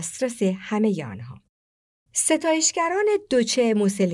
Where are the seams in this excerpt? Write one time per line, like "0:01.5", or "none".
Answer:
none

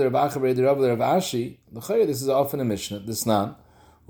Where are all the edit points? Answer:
0:01.6

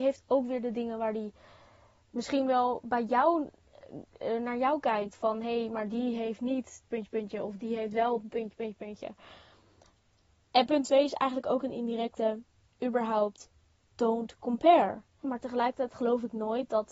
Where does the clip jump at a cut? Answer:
0:06.9
0:15.2

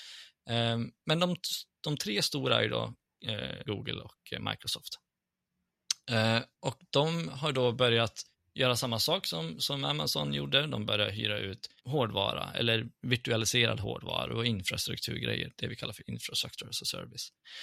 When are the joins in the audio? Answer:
0:03.7
0:11.8

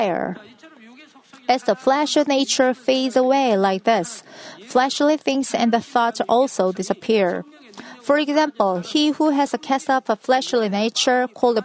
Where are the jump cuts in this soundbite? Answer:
none

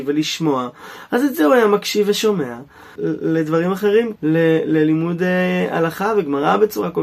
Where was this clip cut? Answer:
0:03.0
0:04.2

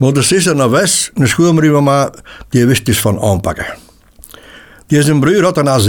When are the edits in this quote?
none

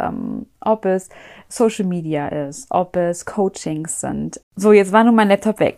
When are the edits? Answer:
0:04.4

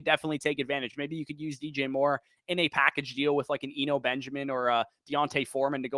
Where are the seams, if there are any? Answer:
none

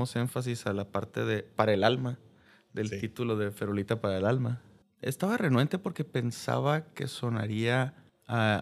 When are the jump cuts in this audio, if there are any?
0:04.8

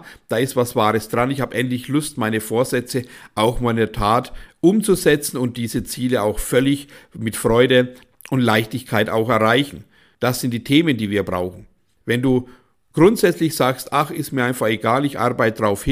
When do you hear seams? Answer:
none

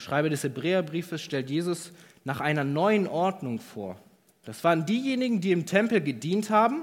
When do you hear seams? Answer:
0:04.4

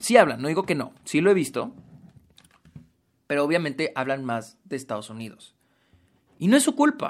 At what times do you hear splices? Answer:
none

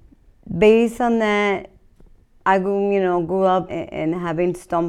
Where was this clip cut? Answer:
0:03.7

